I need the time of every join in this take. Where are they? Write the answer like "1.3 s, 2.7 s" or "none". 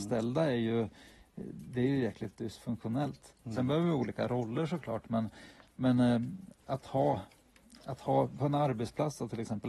3.4 s